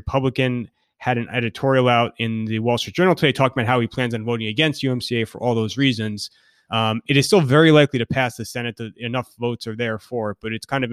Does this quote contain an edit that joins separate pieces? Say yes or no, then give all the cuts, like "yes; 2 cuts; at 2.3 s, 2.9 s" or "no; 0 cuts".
no; 0 cuts